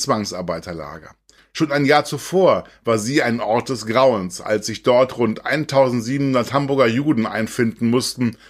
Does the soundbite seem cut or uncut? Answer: cut